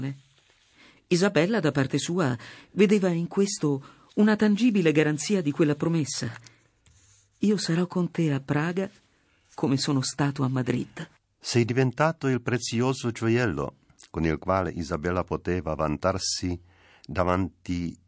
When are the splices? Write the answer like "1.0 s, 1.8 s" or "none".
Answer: none